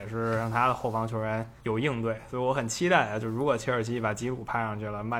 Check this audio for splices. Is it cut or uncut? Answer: uncut